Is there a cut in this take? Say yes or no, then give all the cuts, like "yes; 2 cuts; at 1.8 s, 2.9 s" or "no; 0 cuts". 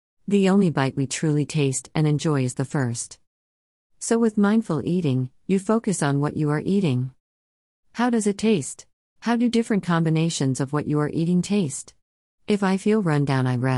yes; 2 cuts; at 9.2 s, 12.4 s